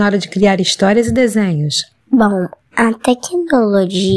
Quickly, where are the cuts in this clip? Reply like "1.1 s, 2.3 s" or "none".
2.0 s